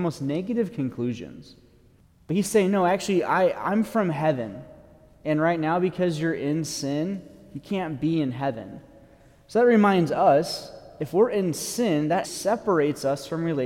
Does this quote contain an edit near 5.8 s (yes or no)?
no